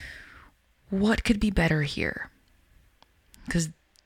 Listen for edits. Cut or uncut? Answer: uncut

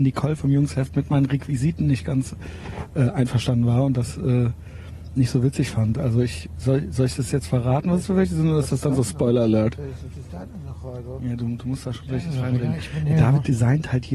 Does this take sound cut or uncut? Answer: uncut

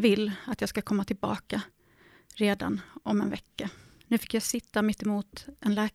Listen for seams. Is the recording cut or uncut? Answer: cut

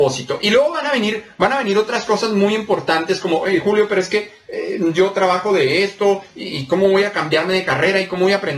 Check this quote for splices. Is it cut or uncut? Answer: uncut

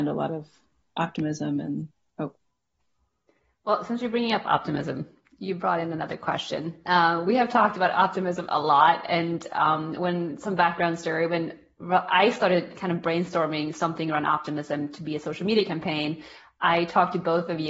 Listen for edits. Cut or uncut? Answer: uncut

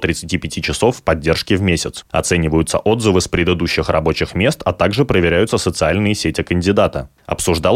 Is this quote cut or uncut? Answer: cut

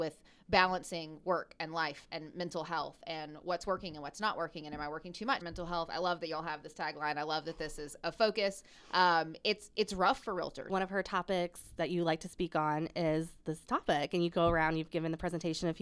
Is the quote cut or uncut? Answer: cut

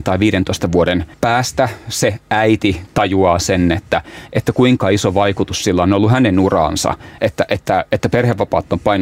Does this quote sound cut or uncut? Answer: cut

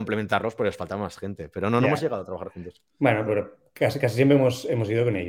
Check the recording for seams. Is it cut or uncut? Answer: cut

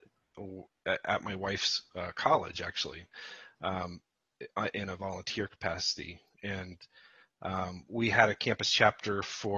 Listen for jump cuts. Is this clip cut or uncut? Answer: uncut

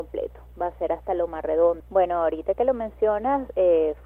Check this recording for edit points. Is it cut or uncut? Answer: cut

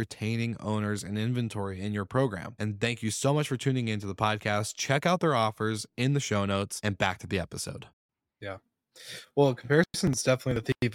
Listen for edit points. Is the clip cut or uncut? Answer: cut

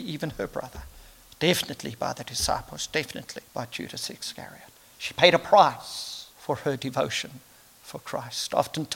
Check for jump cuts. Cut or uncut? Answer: cut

